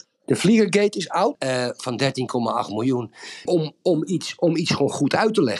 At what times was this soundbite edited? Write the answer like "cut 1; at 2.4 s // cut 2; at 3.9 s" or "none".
cut 1; at 1.3 s // cut 2; at 3.5 s